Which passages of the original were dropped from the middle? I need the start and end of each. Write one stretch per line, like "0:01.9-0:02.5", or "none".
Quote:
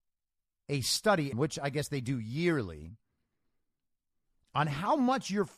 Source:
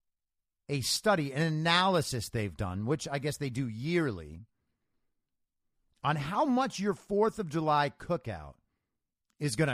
0:01.3-0:02.8